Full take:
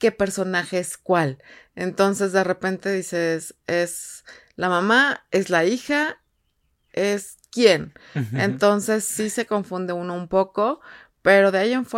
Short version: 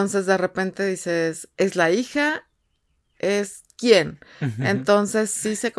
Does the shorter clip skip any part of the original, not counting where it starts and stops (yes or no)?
yes